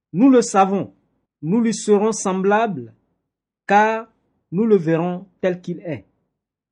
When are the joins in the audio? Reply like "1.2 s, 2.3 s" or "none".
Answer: 1.3 s

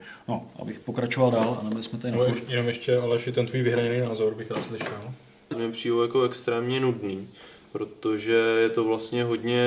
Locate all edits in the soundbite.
5.5 s

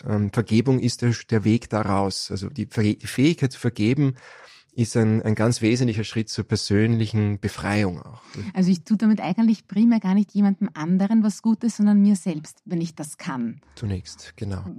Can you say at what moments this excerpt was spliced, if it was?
none

